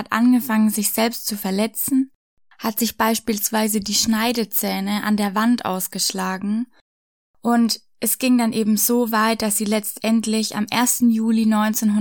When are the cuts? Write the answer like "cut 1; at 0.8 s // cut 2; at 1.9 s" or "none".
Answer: none